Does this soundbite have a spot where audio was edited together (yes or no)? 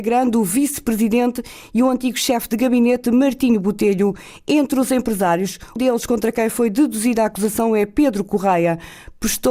yes